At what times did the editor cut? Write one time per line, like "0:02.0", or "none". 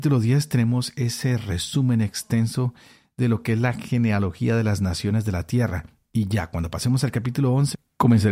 none